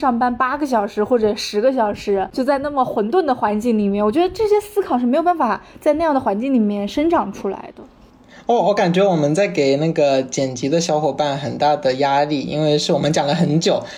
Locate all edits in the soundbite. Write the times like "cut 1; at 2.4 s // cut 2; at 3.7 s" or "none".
none